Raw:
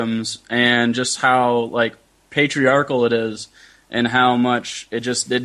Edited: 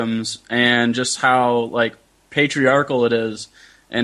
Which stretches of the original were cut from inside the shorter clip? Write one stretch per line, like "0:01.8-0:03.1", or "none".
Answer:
none